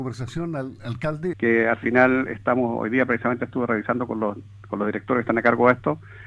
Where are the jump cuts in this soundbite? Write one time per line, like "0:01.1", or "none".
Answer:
0:01.3